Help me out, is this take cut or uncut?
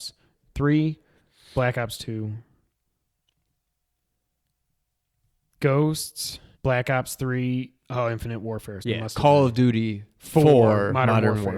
cut